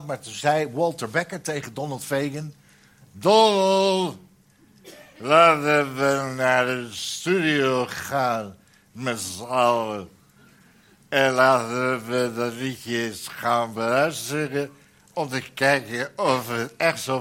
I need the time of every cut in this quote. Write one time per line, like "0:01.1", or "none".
none